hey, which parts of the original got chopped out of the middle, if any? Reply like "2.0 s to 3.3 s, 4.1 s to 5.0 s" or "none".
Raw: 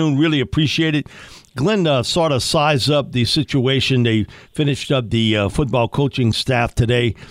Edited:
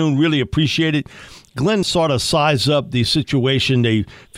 1.8 s to 2.0 s